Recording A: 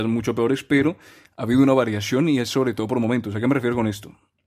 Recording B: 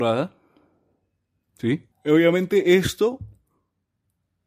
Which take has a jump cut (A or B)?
B